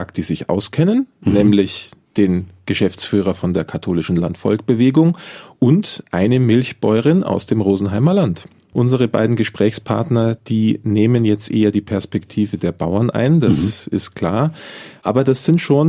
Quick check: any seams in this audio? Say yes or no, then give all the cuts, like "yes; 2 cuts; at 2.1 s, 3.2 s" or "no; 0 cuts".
no; 0 cuts